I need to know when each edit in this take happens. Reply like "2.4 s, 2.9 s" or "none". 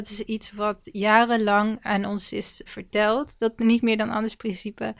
2.7 s